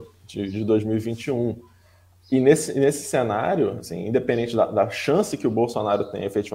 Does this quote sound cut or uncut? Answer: uncut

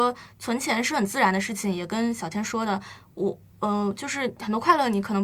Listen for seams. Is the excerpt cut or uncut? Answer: uncut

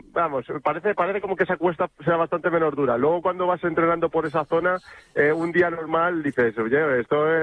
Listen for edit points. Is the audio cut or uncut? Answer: uncut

